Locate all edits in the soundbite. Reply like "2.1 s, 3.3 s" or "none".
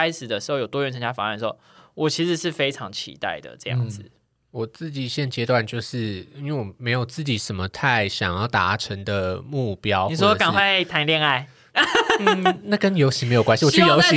none